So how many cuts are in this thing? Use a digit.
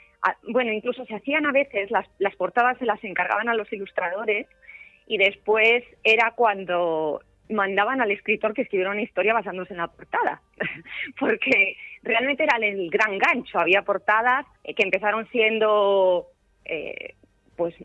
1